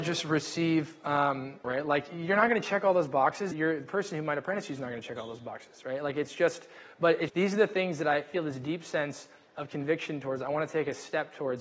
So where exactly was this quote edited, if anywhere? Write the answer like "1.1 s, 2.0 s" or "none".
1.6 s, 3.5 s, 7.3 s